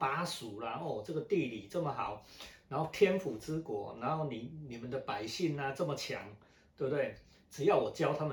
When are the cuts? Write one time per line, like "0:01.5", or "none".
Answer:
none